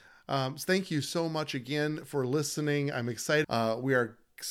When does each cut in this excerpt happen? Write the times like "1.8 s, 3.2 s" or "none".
3.4 s